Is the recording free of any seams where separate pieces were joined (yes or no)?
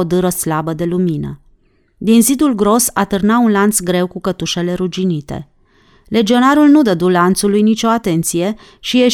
yes